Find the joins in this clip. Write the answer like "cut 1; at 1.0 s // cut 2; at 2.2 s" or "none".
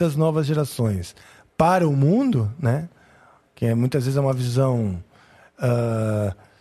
none